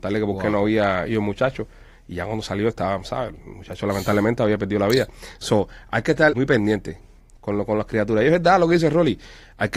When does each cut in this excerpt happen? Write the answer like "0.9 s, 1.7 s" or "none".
6.3 s